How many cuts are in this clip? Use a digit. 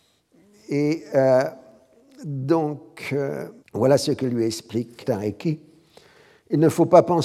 2